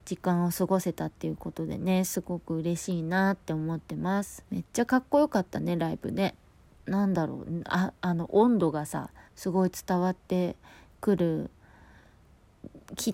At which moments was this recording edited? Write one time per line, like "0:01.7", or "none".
0:04.5
0:09.3